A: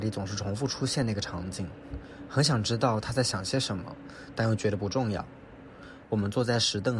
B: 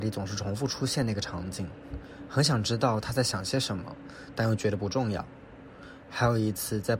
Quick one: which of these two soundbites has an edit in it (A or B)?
A